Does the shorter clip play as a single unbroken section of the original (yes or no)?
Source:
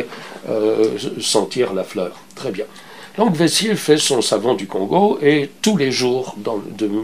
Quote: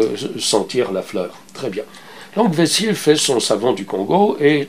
yes